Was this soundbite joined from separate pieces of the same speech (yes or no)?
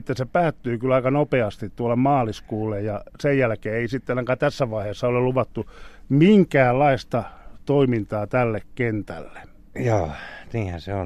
no